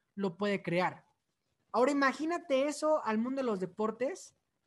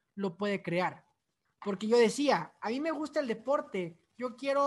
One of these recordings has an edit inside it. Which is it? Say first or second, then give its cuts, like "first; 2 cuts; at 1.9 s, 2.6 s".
second; 1 cut; at 1.5 s